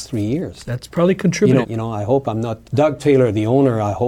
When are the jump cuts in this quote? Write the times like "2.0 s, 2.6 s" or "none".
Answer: 1.6 s, 2.6 s